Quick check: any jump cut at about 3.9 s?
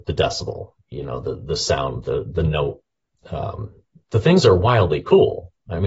yes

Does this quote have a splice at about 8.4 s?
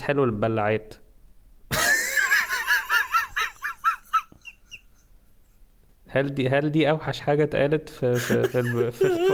no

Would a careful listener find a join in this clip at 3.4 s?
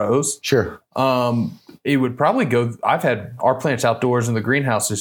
yes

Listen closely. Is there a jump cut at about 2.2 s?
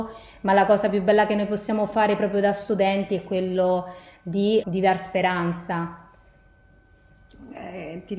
no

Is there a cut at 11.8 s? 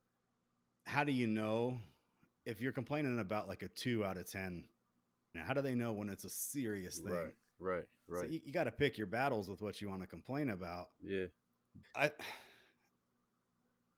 yes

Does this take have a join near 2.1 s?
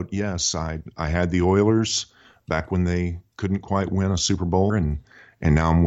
no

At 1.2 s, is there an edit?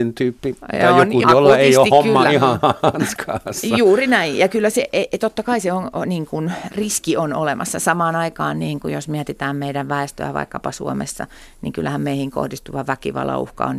yes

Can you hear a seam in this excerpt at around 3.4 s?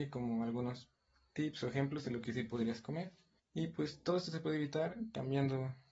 yes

